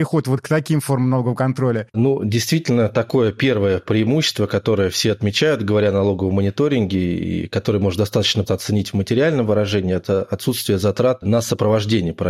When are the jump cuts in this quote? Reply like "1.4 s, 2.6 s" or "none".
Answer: 1.9 s, 8.5 s